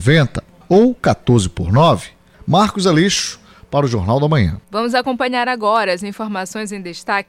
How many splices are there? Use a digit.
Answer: 1